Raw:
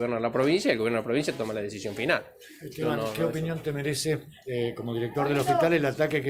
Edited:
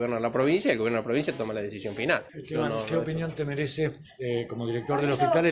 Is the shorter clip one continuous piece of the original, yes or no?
no